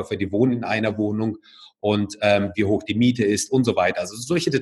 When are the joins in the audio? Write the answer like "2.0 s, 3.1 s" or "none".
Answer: 2.5 s